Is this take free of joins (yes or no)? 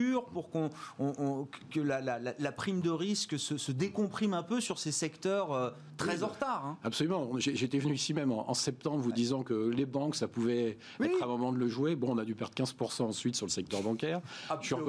yes